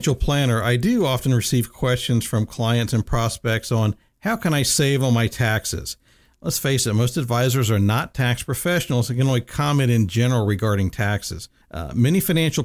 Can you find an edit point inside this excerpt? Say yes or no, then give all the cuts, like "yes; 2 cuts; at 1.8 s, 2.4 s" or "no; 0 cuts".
yes; 1 cut; at 11.6 s